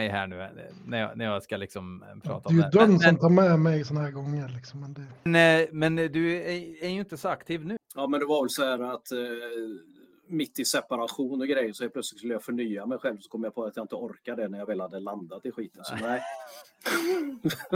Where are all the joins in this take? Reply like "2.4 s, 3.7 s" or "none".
5.3 s, 7.8 s